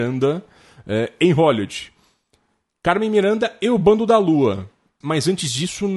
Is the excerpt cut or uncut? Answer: cut